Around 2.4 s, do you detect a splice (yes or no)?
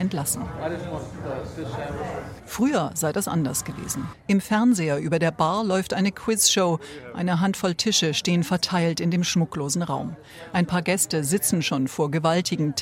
yes